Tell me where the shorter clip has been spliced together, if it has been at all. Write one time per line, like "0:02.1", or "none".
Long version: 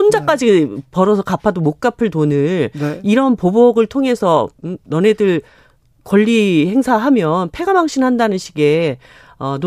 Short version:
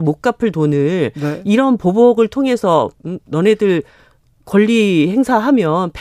none